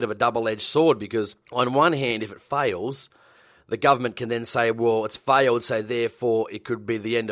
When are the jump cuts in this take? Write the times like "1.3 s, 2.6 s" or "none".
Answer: 1.4 s